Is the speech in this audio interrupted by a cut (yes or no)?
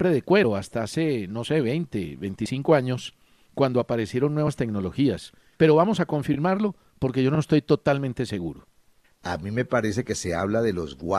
yes